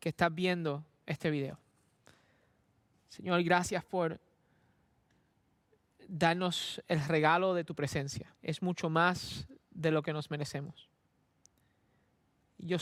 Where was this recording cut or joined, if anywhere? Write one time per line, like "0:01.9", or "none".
0:03.0
0:08.4